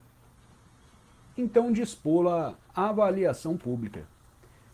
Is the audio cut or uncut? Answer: cut